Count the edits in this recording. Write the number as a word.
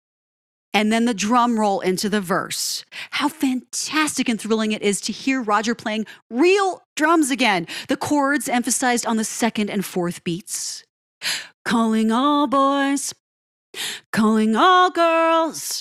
zero